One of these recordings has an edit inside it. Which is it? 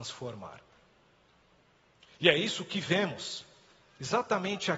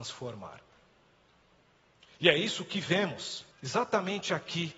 second; 1 cut; at 3.5 s

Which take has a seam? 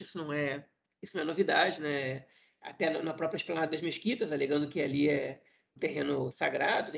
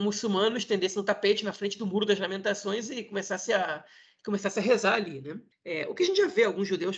first; 1 cut; at 5.8 s

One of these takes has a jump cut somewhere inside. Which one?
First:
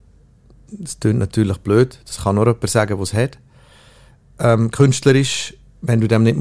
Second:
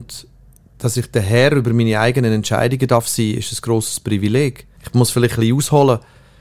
second; 1 cut; at 4.8 s

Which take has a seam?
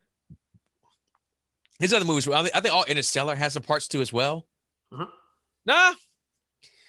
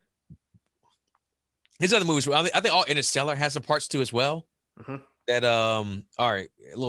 first; 1 cut; at 4.7 s

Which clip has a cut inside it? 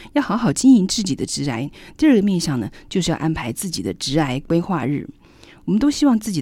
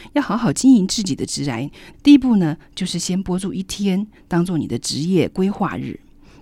second; 1 cut; at 1.9 s

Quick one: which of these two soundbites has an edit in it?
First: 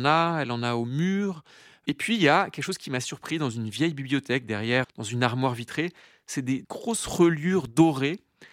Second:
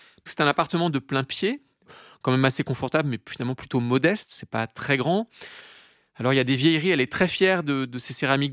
first; 1 cut; at 4.8 s

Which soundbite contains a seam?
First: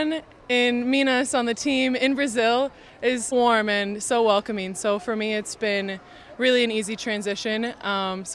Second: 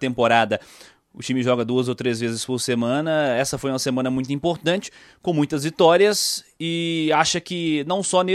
first; 1 cut; at 3.3 s

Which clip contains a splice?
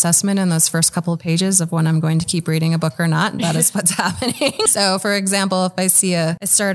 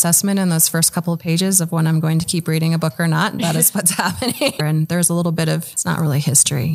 second; 1 cut; at 4.6 s

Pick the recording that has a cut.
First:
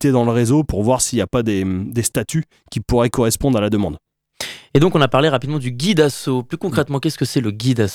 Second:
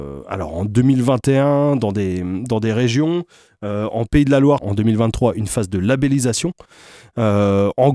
second; 1 cut; at 4.6 s

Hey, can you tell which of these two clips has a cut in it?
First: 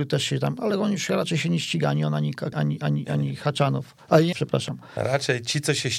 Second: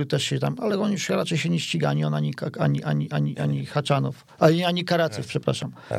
first; 2 cuts; at 2.5 s, 4.3 s

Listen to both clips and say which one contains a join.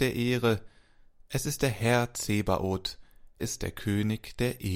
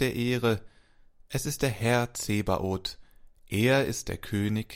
first; 1 cut; at 3.4 s

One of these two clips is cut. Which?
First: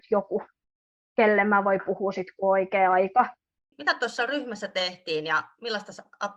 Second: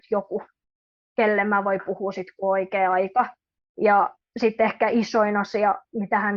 first; 1 cut; at 3.7 s

